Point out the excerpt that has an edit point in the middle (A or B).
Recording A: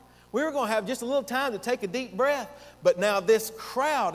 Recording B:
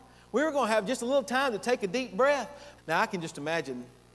B